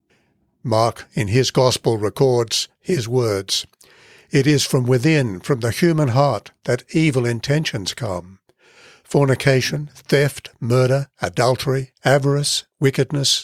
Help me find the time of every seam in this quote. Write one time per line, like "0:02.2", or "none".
0:12.0